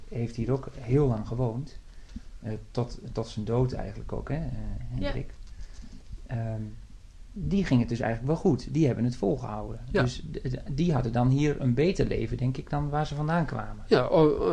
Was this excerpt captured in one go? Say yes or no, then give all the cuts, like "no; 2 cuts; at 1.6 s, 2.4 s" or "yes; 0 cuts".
yes; 0 cuts